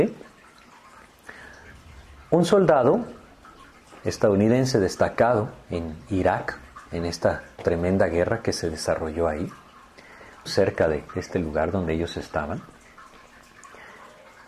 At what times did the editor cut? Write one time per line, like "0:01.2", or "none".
0:10.5